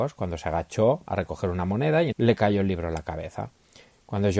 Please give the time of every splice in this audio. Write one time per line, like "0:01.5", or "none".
0:02.1